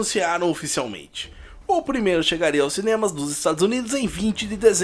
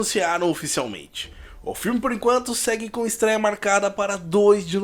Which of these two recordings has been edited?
first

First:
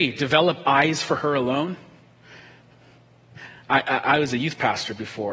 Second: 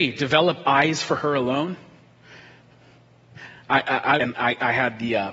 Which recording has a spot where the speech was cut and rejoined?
second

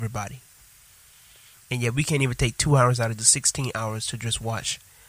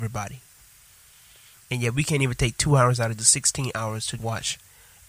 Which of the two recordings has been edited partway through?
second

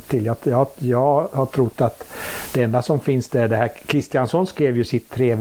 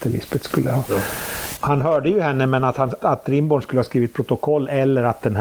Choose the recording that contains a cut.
second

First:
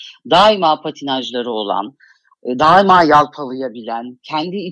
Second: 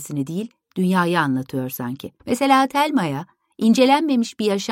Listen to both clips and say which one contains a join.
second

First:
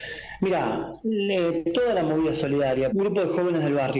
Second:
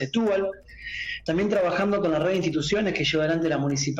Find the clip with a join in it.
first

